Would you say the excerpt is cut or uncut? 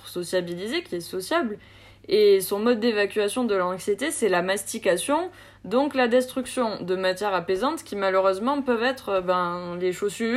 uncut